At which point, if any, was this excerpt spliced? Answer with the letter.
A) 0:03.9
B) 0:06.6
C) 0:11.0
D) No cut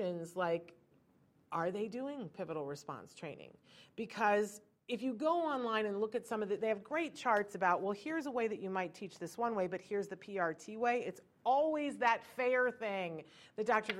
D